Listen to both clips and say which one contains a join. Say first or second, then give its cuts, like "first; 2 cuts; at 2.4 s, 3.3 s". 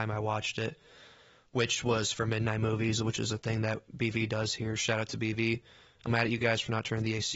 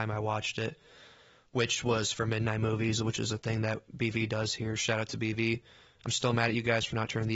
first; 1 cut; at 6.1 s